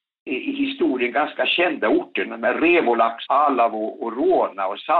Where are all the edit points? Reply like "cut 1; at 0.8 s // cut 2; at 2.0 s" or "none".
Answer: cut 1; at 3.3 s